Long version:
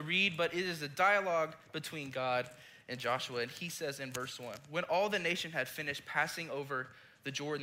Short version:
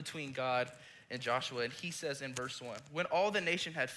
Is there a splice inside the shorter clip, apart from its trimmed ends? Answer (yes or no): no